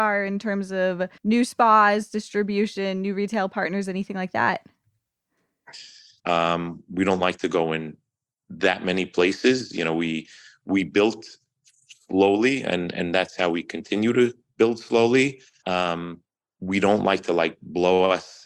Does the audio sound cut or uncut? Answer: cut